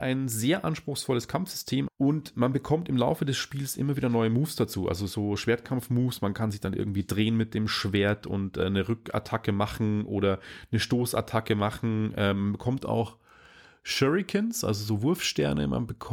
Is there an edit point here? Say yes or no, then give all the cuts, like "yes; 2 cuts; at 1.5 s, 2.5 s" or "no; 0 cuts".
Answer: yes; 1 cut; at 1.9 s